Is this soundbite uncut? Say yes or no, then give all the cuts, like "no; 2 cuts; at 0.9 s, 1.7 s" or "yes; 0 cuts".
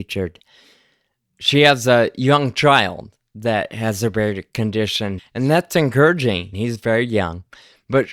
no; 2 cuts; at 5.2 s, 6.5 s